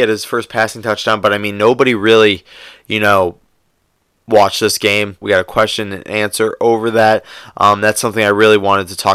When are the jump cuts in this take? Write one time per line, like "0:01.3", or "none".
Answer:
0:05.2